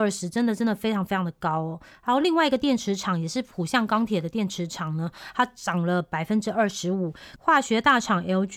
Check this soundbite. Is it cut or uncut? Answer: cut